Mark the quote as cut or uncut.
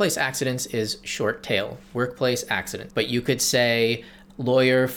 cut